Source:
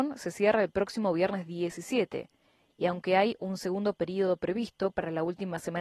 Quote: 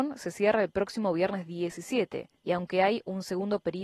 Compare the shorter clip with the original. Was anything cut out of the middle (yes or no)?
yes